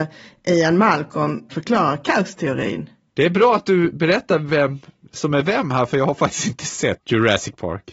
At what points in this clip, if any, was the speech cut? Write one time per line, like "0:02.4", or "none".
0:01.5